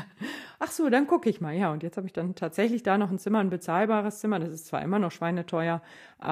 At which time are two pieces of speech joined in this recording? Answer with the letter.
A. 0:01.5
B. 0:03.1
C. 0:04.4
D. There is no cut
D